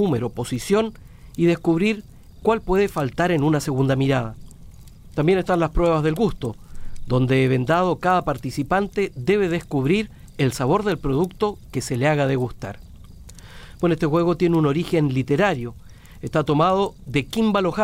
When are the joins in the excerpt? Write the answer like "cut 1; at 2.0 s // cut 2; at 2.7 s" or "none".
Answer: none